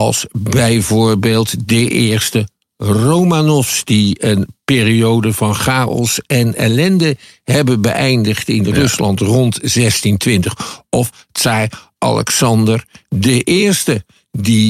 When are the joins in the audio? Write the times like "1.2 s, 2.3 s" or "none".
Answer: none